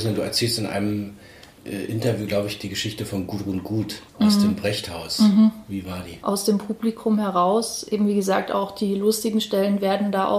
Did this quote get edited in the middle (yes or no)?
yes